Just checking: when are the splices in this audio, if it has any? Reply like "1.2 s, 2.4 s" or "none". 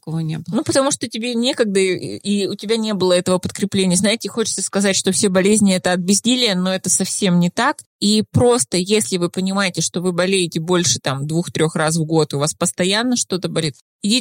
none